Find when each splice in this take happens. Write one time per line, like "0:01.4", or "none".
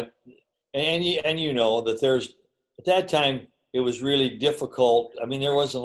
none